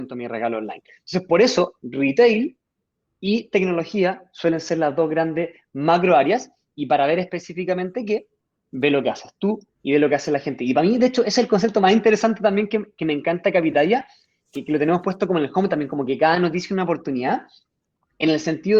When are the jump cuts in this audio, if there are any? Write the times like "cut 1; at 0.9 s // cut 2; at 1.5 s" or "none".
none